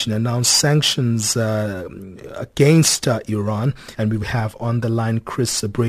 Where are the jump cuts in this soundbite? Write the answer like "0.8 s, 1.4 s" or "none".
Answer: 3.9 s